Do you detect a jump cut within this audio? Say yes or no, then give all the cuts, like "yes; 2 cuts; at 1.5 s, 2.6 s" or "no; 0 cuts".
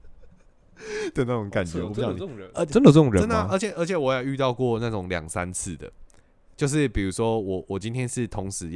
no; 0 cuts